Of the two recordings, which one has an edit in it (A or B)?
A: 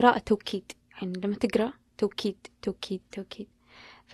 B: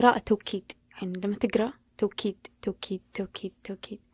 A